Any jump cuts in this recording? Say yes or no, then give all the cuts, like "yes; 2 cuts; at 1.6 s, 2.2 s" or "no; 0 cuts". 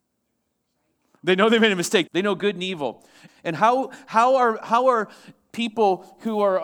yes; 2 cuts; at 2.1 s, 3.3 s